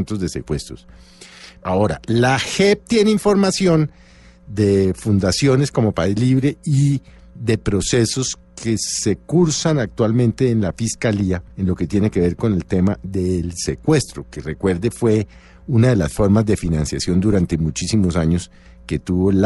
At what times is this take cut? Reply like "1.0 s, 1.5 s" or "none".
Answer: 1.6 s, 11.5 s